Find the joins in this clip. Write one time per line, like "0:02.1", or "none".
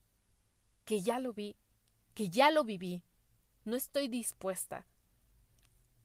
none

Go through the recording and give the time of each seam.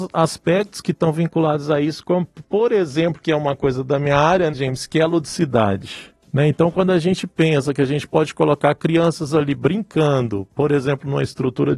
0:04.5

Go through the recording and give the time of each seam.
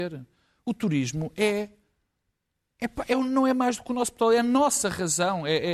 none

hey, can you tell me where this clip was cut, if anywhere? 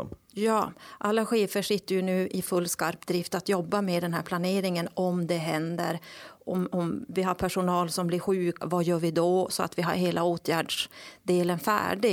0:08.6

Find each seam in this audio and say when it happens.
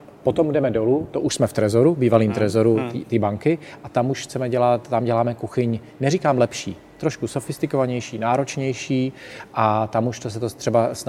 none

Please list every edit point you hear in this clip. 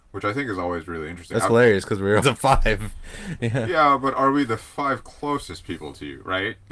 0:02.2

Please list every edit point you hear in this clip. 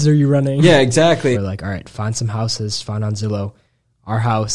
0:01.3

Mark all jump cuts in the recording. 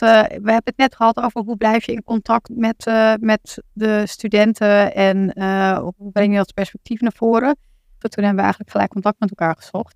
0:02.5
0:08.0

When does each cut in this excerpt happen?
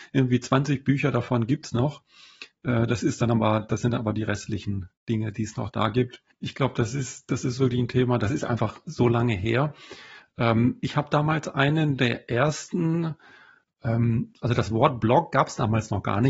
0:06.3

